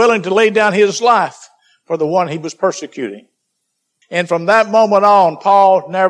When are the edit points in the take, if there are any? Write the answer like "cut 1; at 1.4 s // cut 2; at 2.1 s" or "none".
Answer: cut 1; at 4.0 s